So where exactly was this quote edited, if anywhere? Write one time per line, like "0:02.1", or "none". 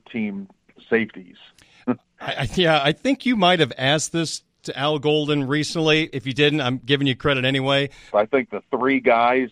0:08.1